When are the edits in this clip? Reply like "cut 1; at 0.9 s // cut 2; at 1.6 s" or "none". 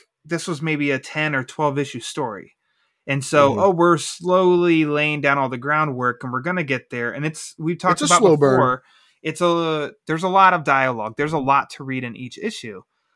none